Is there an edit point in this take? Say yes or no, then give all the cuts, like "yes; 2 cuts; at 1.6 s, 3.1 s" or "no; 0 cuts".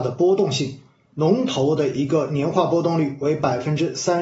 yes; 1 cut; at 1.1 s